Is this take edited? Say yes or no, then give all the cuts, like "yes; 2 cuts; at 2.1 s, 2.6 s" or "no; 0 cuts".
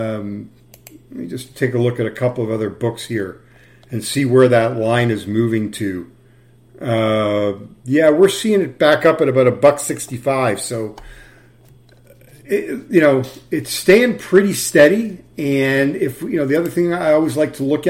no; 0 cuts